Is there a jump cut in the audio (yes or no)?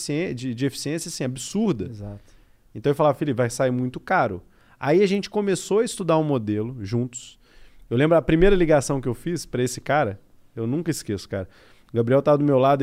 no